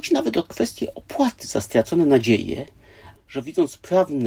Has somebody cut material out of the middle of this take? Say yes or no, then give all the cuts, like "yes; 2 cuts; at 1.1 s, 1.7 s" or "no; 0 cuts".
yes; 1 cut; at 3.2 s